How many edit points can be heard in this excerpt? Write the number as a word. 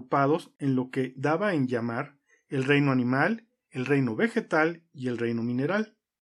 zero